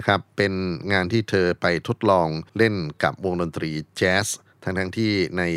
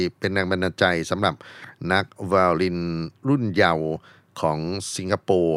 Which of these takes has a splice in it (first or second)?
first